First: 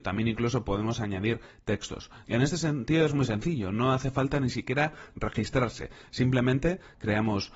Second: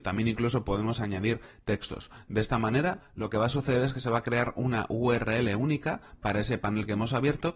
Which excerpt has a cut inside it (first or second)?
first